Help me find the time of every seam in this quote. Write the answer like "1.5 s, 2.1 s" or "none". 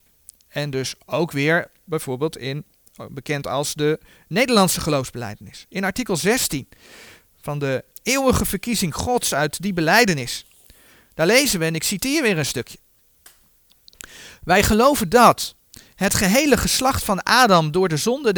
1.9 s